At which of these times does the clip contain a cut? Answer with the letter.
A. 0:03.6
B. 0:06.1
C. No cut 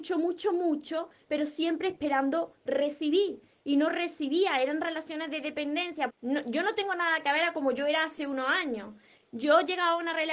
B